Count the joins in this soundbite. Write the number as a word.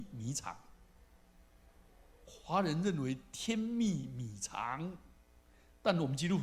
one